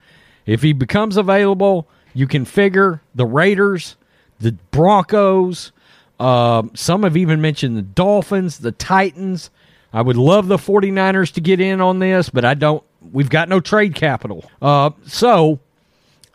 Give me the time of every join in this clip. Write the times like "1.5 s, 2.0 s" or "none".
14.5 s